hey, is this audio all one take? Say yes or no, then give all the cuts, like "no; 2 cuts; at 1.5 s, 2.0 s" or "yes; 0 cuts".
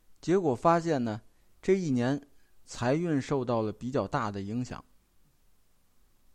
yes; 0 cuts